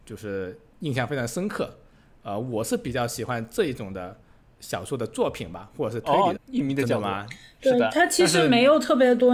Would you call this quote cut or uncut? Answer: cut